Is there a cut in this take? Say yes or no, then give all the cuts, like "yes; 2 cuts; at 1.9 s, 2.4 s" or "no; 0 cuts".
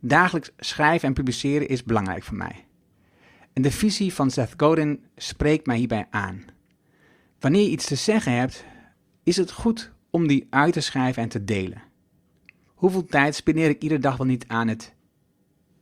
yes; 2 cuts; at 9.2 s, 12.7 s